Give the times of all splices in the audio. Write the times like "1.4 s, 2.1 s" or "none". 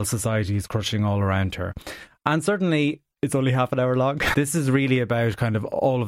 3.1 s, 4.3 s